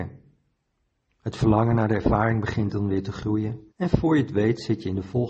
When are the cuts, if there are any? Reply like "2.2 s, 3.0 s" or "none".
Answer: 1.1 s, 3.7 s

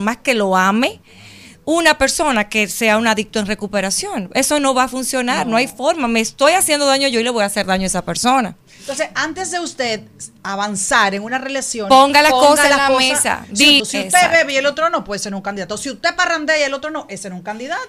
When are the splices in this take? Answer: 13.8 s

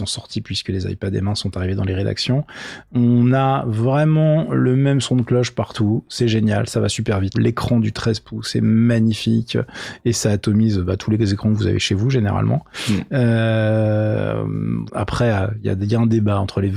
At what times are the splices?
7.3 s, 14.9 s

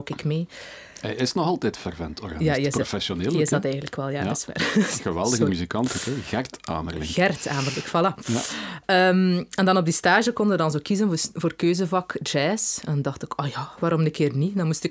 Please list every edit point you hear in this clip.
none

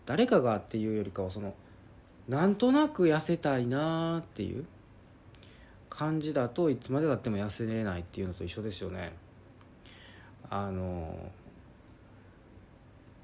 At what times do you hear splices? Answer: none

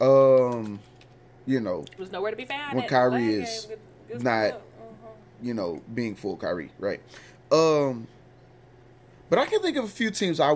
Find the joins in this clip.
2.0 s

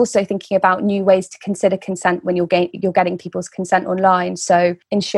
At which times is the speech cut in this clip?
none

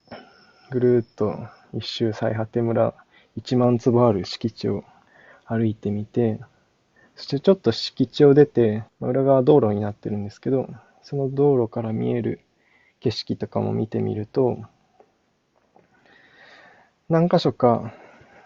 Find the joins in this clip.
8.9 s

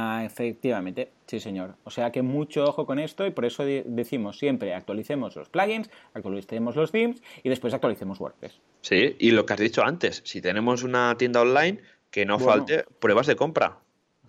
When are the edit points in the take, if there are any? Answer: none

